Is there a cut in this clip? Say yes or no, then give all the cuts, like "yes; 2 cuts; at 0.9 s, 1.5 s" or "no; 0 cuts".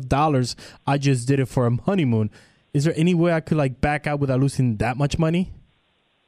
no; 0 cuts